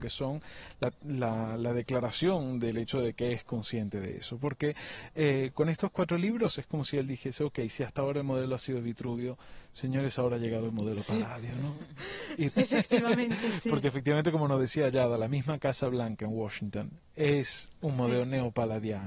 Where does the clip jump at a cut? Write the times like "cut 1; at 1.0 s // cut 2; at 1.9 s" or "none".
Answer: cut 1; at 12.5 s